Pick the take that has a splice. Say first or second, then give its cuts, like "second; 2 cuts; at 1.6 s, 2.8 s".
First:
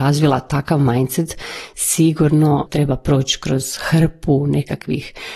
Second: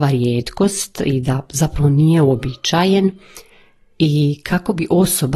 first; 1 cut; at 2.7 s